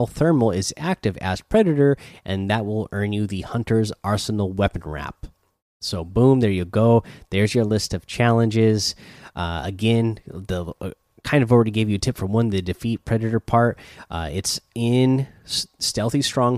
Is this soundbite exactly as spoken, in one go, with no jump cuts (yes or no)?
yes